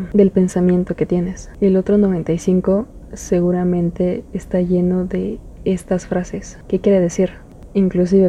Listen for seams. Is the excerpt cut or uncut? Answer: cut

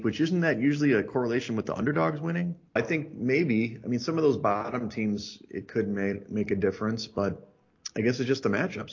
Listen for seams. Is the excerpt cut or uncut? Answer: cut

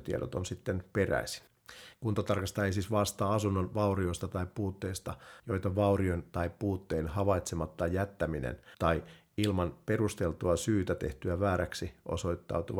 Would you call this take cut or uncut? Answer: cut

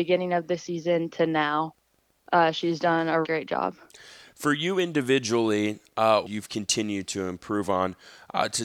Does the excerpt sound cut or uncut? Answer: cut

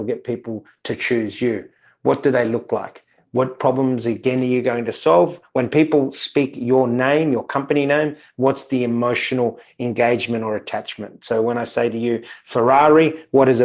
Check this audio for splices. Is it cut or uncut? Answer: uncut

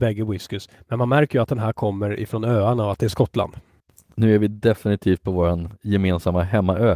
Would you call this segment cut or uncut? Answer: uncut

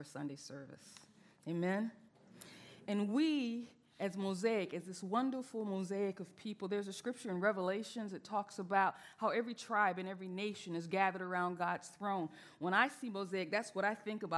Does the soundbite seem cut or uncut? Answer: uncut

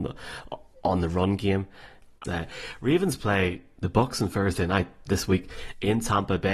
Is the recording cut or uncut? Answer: cut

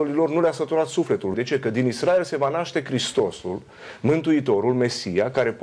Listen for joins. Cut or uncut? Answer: cut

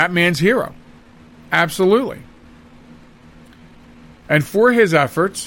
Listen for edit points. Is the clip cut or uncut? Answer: uncut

